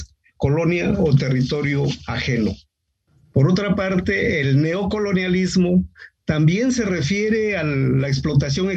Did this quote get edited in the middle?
no; 0 cuts

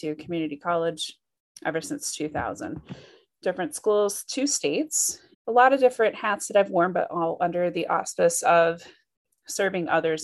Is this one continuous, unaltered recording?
no; 1 cut; at 5.3 s

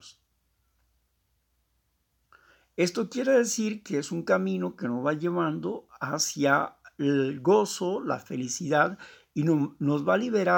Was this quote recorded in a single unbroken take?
yes; 0 cuts

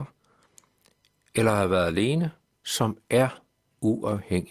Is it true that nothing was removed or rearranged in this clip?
no; 1 cut; at 2.5 s

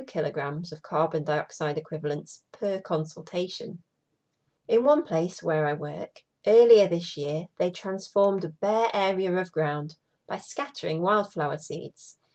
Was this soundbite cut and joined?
yes; 1 cut; at 4.6 s

